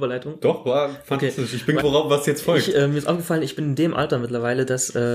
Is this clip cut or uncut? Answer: cut